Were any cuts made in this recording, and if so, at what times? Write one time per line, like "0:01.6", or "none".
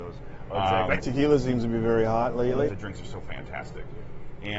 0:01.0
0:02.7